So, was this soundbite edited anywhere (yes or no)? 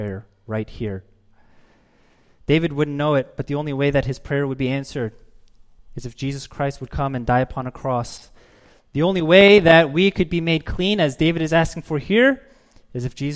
no